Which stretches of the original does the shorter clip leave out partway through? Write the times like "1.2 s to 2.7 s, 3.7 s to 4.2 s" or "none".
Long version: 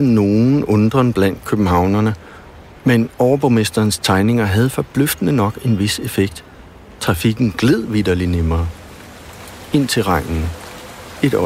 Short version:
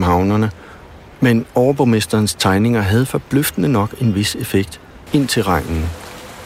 6.7 s to 9.7 s